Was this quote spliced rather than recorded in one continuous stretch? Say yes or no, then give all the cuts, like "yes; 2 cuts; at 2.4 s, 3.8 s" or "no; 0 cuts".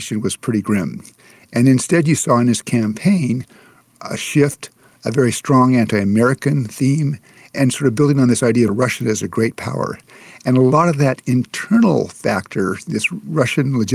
no; 0 cuts